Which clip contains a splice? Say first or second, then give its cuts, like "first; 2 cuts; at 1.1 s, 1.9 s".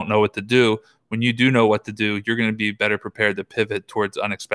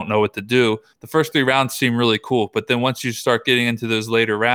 second; 1 cut; at 0.9 s